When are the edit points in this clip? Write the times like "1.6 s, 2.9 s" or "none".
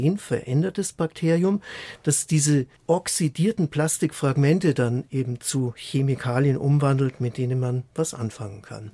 2.8 s